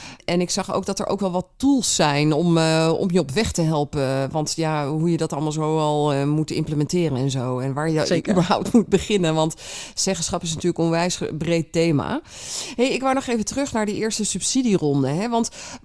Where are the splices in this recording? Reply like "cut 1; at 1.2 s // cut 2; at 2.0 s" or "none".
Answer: none

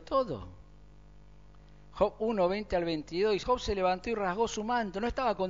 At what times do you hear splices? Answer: cut 1; at 3.4 s

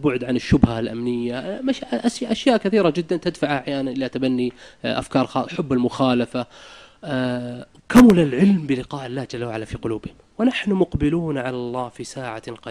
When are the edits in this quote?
cut 1; at 7.8 s

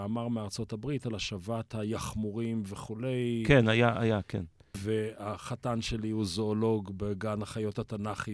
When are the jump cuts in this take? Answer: cut 1; at 4.7 s

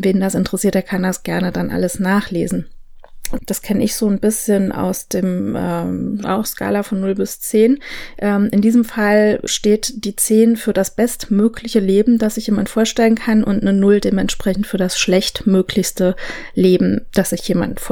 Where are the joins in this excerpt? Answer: cut 1; at 3.4 s // cut 2; at 6.2 s // cut 3; at 9.5 s

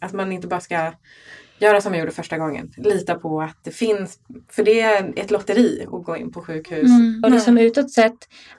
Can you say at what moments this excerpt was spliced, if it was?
cut 1; at 7.2 s

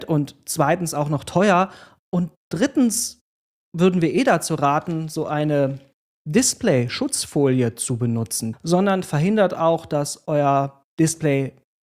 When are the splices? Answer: cut 1; at 8.5 s

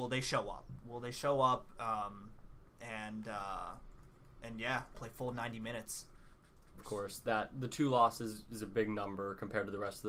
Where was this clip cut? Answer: cut 1; at 4.9 s // cut 2; at 6.8 s

